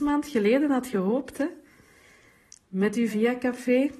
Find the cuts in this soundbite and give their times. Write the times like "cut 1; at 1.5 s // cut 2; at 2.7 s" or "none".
cut 1; at 3.1 s